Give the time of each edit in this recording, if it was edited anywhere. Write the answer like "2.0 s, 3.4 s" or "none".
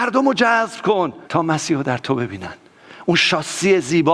1.2 s